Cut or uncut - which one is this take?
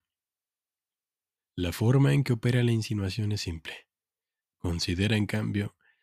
cut